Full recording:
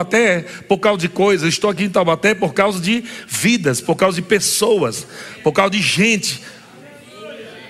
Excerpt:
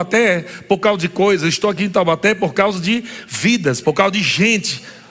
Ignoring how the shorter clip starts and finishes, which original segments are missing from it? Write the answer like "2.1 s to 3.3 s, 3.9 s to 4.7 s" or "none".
3.8 s to 5.4 s